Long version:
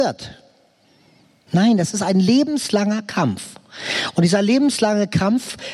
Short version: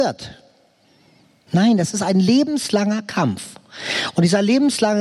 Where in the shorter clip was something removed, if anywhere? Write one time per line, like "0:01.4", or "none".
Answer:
none